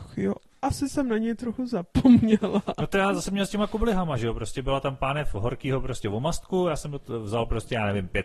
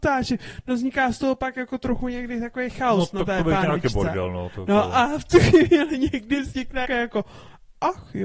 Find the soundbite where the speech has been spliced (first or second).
second